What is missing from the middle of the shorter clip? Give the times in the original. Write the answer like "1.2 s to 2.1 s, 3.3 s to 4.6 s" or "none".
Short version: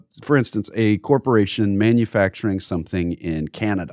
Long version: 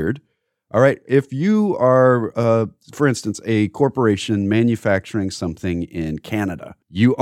none